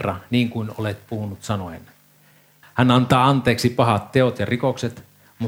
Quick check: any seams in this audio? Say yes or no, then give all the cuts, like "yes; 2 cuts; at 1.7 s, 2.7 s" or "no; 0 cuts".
yes; 1 cut; at 2.6 s